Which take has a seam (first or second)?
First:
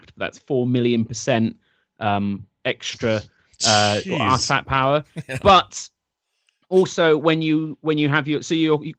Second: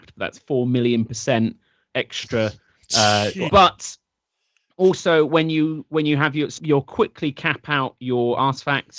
second